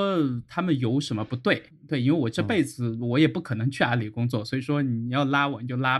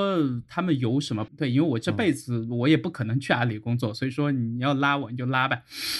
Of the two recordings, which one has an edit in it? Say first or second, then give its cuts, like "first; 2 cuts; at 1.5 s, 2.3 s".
second; 1 cut; at 1.3 s